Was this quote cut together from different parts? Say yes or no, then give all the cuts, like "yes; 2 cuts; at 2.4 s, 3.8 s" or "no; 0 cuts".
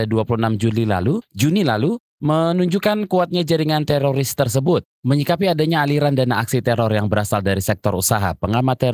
yes; 1 cut; at 4.9 s